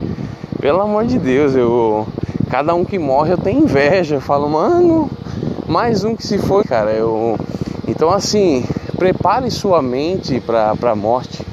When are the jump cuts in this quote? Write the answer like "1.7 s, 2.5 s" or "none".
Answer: 6.6 s

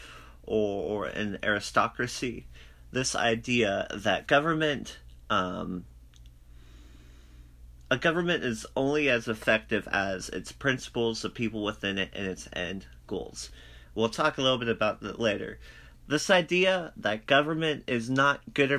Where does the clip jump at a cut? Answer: 4.3 s, 13.8 s, 15.9 s

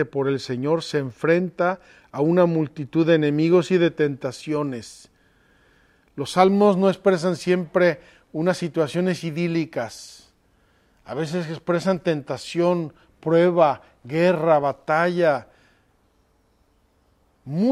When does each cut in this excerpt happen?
none

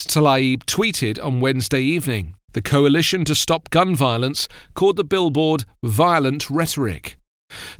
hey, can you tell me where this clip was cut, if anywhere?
2.4 s

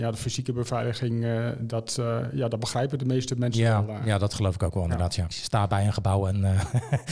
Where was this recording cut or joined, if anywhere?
5.3 s

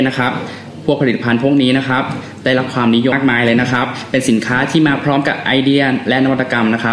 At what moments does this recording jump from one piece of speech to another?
3.1 s

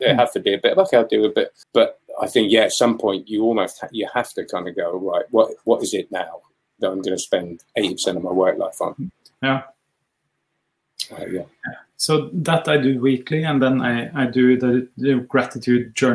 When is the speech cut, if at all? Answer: 1.6 s, 7.7 s

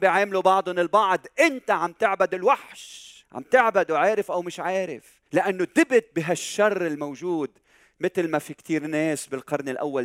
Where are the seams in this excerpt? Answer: 3.2 s, 5.3 s

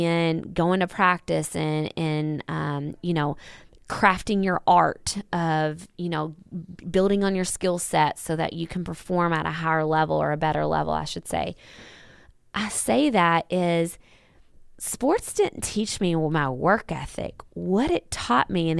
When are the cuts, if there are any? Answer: none

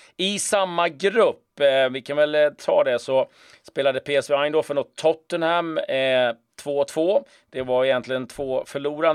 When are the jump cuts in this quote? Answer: none

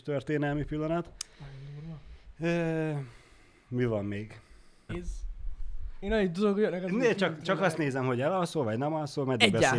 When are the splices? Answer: 4.9 s

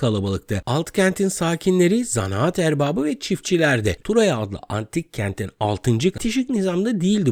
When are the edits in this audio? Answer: 4.0 s, 6.1 s

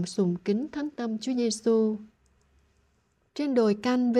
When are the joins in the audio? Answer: none

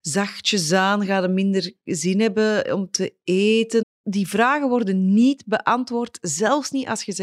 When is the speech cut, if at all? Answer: 3.8 s

